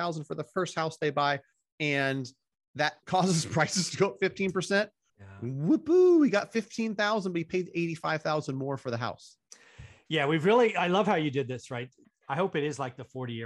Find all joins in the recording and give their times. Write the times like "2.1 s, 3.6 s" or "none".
5.1 s, 12.0 s